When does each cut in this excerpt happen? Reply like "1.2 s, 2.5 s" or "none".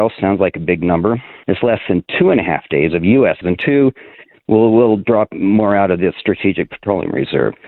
1.4 s, 3.4 s